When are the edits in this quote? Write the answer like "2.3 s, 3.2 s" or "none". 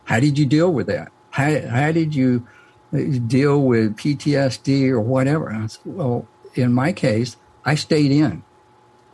none